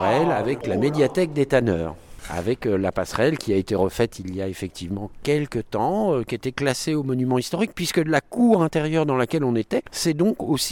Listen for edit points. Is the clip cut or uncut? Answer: uncut